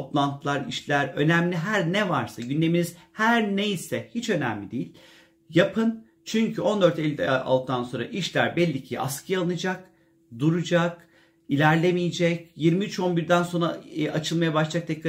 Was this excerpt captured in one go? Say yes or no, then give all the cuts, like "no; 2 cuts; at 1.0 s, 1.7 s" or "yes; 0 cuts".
yes; 0 cuts